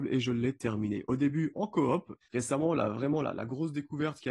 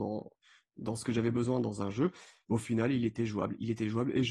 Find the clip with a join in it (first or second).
first